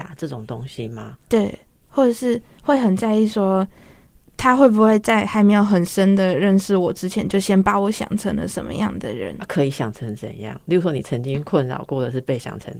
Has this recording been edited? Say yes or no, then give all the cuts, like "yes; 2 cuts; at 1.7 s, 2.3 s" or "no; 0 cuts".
no; 0 cuts